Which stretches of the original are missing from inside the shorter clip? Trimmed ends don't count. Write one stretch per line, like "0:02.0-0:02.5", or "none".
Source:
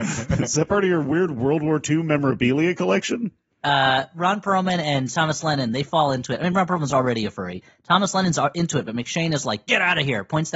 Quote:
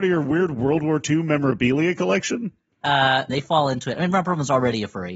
0:04.1-0:05.7